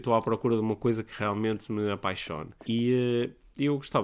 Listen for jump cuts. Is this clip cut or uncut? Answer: cut